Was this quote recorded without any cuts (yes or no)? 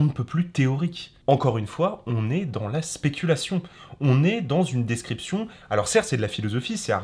yes